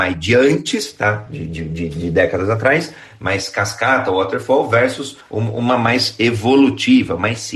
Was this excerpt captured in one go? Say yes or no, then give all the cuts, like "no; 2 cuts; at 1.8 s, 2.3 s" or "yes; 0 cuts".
yes; 0 cuts